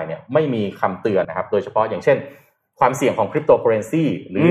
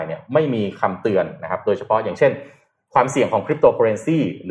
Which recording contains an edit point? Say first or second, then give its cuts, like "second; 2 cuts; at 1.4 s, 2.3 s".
first; 1 cut; at 1.2 s